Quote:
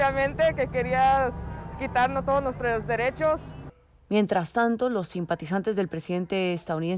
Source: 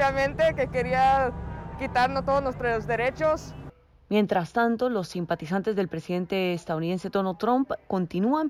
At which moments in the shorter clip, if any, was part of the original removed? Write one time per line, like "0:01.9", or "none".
none